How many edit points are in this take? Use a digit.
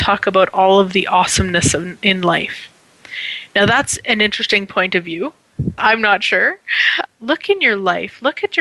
2